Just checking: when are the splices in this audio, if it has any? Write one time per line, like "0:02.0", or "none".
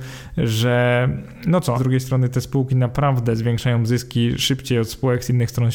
0:01.7

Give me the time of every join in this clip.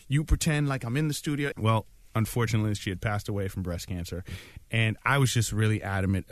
0:01.5

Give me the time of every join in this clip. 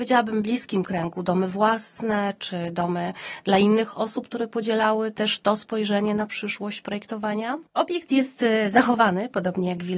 0:07.7

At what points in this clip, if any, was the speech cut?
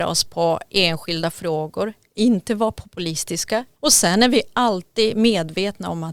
0:03.8

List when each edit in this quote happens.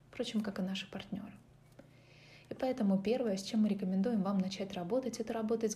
none

